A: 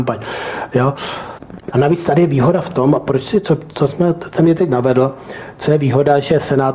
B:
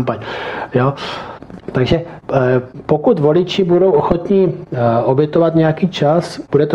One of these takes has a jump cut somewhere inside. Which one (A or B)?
A